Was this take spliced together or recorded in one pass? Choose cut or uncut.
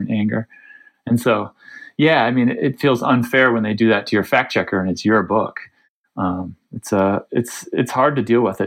cut